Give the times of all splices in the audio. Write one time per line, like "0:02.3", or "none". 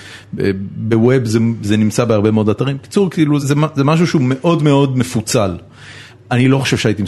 0:03.4
0:06.1

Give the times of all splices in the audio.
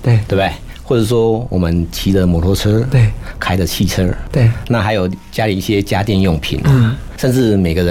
none

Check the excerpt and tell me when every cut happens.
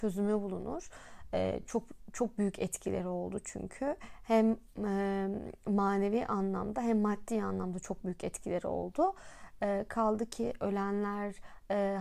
none

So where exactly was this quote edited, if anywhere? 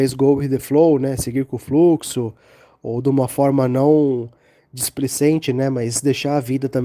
none

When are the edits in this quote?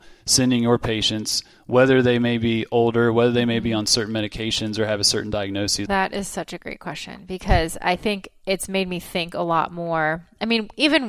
0:05.9

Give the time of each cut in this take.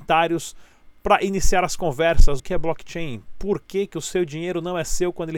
0:02.4

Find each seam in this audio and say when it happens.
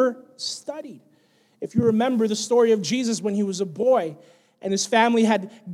none

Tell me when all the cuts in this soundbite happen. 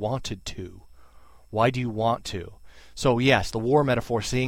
none

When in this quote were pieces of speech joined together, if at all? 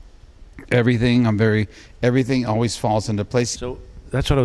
0:03.5

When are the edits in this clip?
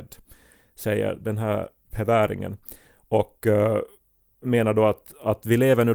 none

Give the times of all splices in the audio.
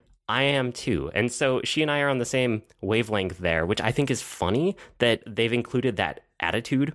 none

